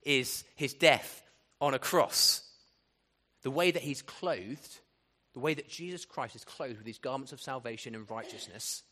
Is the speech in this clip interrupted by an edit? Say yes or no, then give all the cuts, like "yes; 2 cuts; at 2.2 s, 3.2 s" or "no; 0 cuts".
yes; 1 cut; at 3.3 s